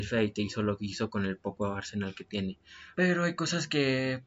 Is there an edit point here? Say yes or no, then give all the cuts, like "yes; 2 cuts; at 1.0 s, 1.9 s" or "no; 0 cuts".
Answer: yes; 1 cut; at 2.9 s